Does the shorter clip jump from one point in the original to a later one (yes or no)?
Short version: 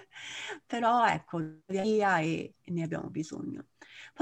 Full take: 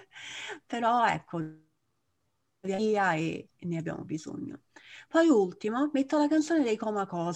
yes